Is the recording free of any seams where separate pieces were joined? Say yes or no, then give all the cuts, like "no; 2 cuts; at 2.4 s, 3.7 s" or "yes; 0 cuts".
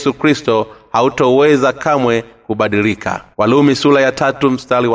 no; 1 cut; at 3.3 s